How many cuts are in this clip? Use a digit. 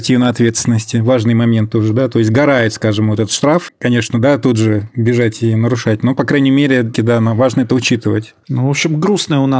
3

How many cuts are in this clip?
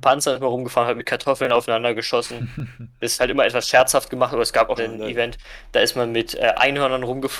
1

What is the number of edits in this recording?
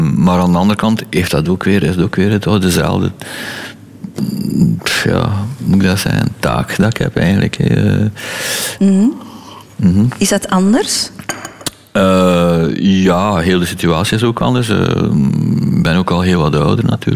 1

